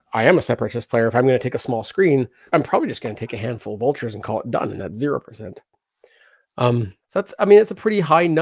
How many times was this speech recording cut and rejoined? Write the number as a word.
two